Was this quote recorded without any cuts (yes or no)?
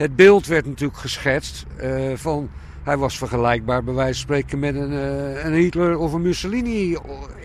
yes